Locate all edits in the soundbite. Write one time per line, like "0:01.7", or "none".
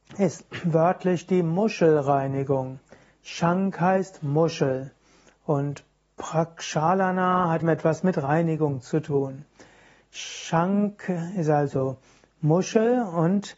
0:07.6